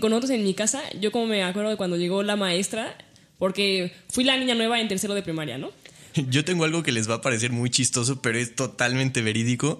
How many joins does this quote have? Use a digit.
1